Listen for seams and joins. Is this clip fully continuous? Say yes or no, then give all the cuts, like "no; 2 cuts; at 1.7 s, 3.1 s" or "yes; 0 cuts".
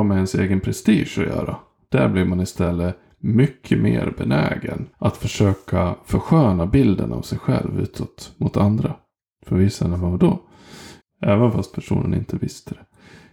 no; 2 cuts; at 4.9 s, 11.0 s